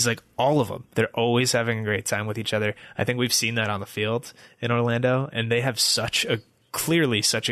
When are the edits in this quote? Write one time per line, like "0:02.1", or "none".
0:00.9
0:05.3